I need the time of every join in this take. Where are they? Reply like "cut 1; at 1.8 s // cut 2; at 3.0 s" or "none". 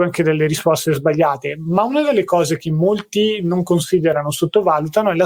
none